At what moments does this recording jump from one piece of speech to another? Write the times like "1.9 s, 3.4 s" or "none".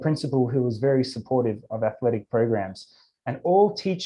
3.1 s